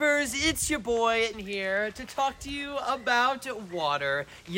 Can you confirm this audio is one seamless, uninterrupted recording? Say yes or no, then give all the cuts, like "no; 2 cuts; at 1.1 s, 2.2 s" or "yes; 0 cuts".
no; 1 cut; at 1.3 s